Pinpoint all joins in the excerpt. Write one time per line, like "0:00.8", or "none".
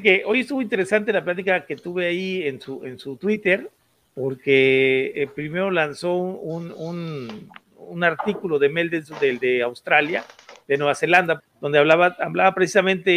0:11.4